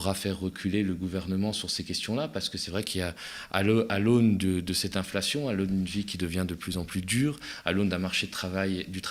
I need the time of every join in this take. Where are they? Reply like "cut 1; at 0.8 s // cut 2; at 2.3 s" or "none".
none